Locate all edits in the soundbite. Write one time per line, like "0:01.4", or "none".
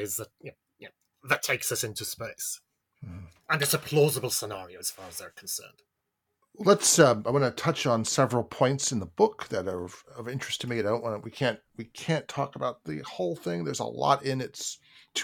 none